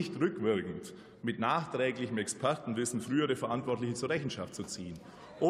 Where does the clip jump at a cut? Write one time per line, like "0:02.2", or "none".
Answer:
none